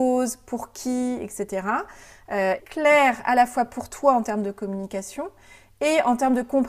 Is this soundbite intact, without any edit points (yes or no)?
no